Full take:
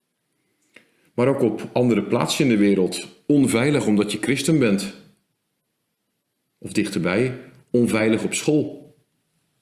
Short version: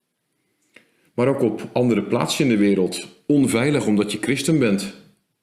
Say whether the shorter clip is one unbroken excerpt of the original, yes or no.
yes